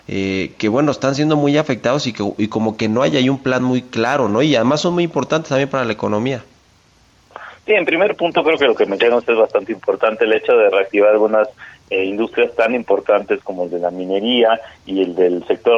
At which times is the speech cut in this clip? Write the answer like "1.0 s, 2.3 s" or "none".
none